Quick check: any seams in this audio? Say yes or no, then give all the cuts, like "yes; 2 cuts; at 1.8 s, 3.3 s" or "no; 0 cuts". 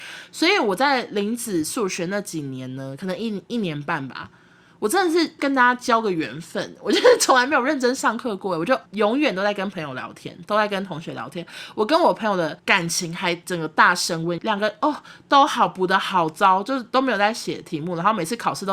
yes; 1 cut; at 14.4 s